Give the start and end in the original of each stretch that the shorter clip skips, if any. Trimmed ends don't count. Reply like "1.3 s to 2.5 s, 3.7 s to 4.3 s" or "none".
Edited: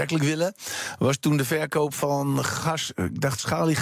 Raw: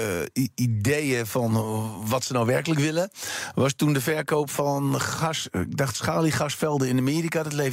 none